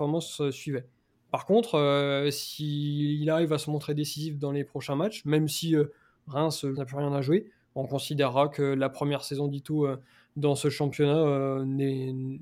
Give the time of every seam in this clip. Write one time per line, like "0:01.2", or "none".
0:06.7